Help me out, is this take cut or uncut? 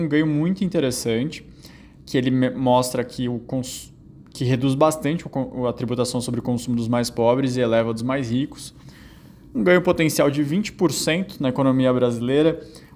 uncut